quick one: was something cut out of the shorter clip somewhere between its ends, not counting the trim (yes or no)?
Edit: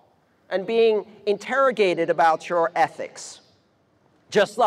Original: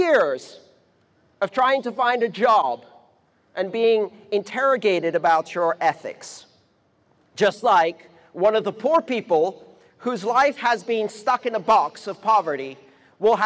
no